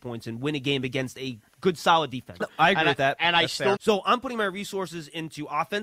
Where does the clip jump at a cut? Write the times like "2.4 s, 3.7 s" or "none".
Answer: 2.4 s, 3.8 s